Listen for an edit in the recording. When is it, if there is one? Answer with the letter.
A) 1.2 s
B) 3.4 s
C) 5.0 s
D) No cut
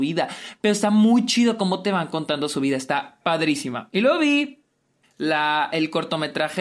C